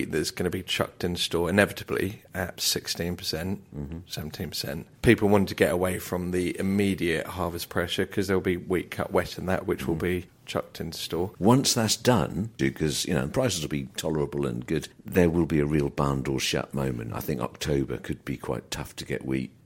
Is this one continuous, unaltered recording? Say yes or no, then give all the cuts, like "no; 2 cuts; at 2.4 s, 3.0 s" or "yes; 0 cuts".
no; 2 cuts; at 11.3 s, 12.6 s